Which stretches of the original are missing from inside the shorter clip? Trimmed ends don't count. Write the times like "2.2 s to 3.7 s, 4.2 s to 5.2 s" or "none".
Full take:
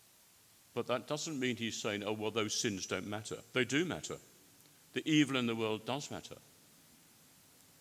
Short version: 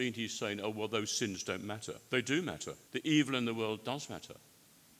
4.3 s to 4.9 s